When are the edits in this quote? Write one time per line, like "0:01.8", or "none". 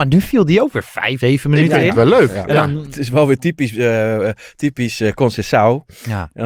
0:01.2